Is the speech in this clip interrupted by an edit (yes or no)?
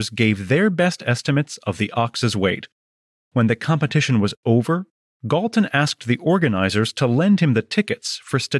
yes